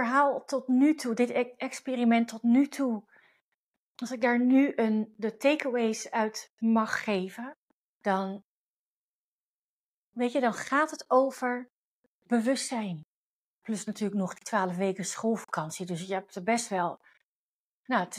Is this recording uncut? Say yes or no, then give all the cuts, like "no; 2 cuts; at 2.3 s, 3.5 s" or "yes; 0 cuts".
no; 1 cut; at 13.6 s